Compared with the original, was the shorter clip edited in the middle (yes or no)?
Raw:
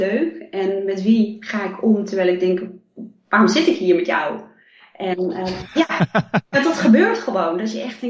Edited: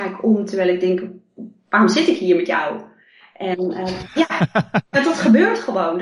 no